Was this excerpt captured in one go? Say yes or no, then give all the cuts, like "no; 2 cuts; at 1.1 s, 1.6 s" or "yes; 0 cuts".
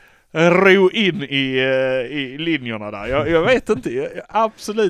yes; 0 cuts